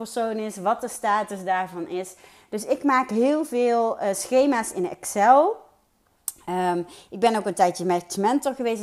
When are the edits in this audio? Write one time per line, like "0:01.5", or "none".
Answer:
none